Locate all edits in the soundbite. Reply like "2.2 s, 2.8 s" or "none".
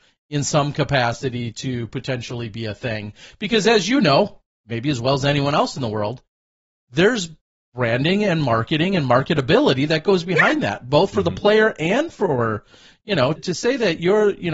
13.4 s